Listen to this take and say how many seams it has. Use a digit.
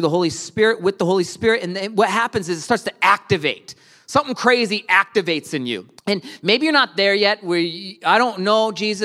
1